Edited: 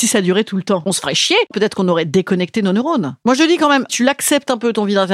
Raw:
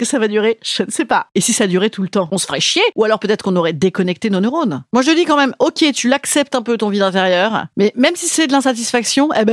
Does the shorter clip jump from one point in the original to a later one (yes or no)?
yes